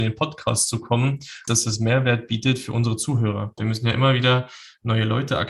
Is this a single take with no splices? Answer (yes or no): no